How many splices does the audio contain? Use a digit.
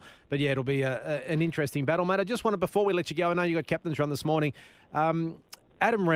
0